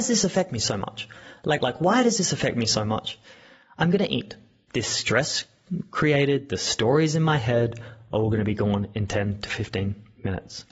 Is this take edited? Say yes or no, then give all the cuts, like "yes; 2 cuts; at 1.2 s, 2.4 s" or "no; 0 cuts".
yes; 2 cuts; at 1.6 s, 4.7 s